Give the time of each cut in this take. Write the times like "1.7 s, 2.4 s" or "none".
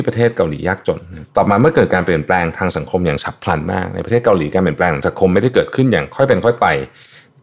1.3 s